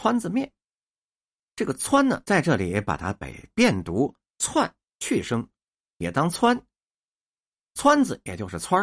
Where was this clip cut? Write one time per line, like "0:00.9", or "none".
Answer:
none